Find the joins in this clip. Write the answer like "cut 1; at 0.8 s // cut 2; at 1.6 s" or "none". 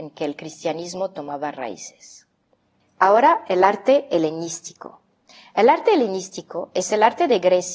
none